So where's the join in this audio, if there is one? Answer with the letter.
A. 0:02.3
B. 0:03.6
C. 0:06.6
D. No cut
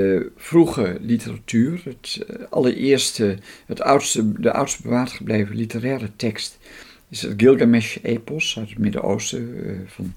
D